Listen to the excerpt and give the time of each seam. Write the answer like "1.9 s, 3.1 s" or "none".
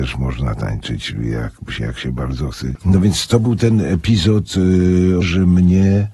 2.8 s, 5.2 s